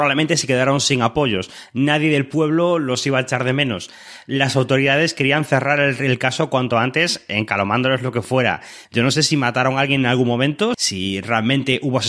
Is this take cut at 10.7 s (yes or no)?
yes